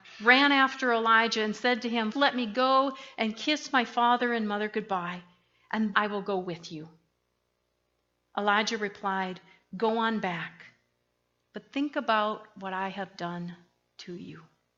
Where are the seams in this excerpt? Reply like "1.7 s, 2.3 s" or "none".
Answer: 2.1 s, 5.9 s